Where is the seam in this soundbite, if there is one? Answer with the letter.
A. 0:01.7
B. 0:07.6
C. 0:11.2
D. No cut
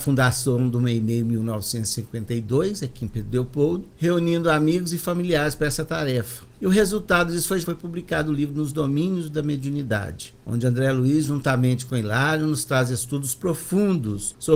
B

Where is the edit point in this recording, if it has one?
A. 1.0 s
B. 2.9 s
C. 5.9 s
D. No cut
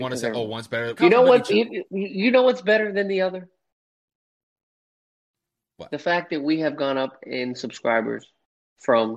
A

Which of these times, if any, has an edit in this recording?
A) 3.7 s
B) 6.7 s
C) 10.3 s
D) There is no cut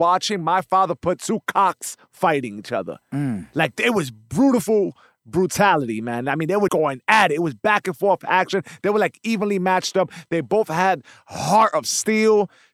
B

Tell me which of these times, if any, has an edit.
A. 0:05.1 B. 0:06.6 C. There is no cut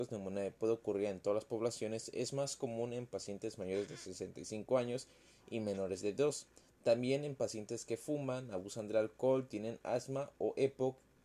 C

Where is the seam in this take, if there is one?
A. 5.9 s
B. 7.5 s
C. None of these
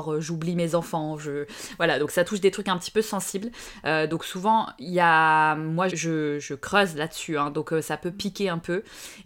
A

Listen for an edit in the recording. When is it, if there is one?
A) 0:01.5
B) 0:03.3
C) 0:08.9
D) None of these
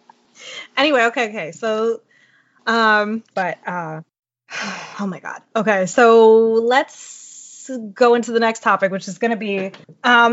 B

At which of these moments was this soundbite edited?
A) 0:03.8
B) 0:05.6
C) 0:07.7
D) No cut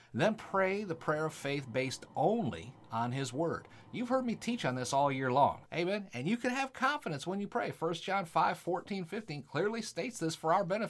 B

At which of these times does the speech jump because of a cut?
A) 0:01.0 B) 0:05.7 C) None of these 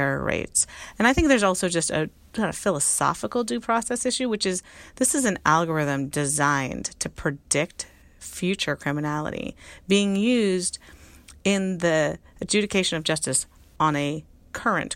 A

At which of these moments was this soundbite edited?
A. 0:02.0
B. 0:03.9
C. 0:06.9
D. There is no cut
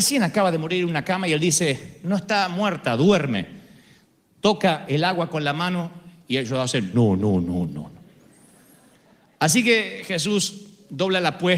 C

